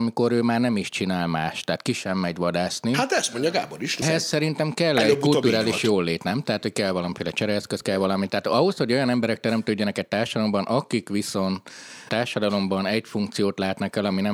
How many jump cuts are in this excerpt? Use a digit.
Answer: 1